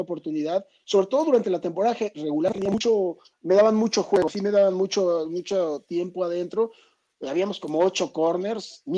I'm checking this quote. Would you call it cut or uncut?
uncut